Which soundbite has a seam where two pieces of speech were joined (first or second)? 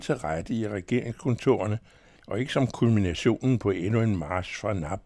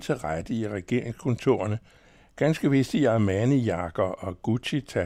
first